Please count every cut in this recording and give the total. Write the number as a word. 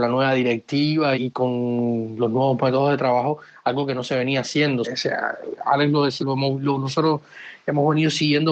three